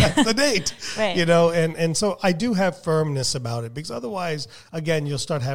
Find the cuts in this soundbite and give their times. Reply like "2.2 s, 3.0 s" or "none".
none